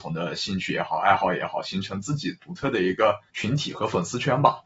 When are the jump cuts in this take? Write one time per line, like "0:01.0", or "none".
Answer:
0:03.3